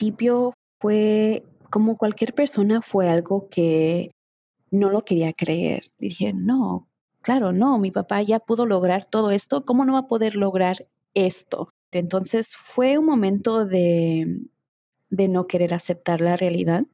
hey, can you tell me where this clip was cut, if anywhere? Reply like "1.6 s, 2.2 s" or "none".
6.0 s, 11.9 s